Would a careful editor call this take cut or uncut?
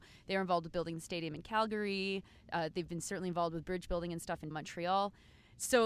cut